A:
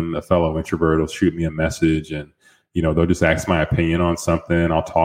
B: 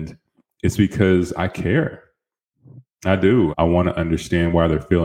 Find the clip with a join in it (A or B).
B